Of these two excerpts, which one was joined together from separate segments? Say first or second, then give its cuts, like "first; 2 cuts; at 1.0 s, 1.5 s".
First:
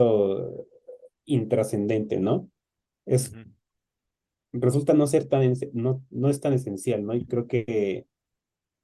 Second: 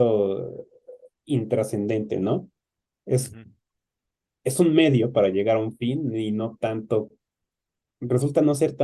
first; 1 cut; at 4.3 s